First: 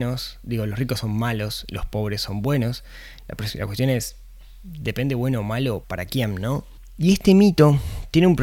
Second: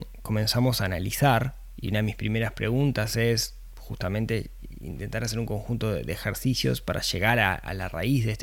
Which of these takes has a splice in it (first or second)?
first